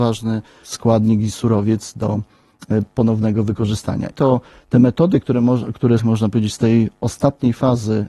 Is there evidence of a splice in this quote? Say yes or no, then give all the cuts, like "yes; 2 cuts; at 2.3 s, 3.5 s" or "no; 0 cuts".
yes; 2 cuts; at 4.1 s, 6.0 s